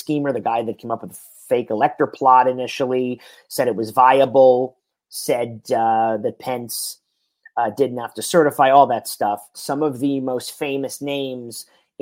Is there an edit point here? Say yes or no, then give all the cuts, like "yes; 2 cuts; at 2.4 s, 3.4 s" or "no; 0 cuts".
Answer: yes; 1 cut; at 9.5 s